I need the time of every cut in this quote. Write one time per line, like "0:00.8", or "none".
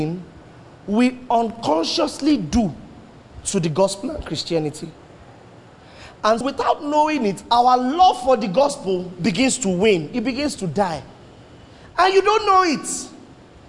0:06.4